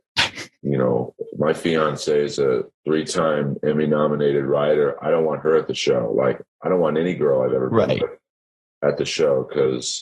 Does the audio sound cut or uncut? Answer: uncut